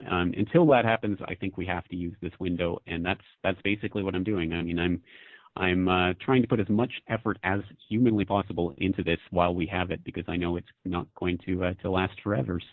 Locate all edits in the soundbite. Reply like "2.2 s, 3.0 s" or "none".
none